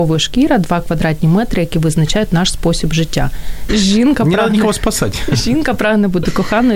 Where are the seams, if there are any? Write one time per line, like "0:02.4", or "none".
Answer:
0:03.7